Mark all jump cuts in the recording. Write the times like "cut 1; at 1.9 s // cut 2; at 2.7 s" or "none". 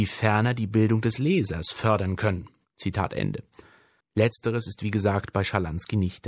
cut 1; at 4.0 s